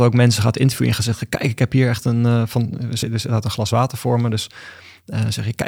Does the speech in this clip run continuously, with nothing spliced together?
yes; 0 cuts

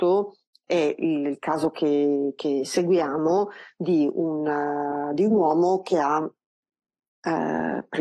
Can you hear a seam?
no; 0 cuts

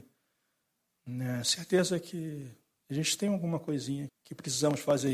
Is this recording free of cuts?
no; 2 cuts; at 1.4 s, 4.1 s

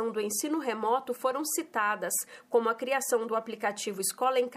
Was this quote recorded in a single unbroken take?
yes; 0 cuts

